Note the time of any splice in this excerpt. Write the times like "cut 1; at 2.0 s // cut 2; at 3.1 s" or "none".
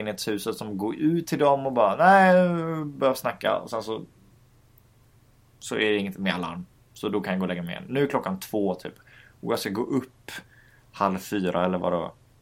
none